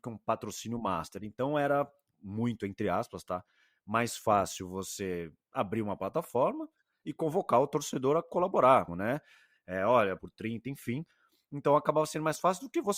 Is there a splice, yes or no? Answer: yes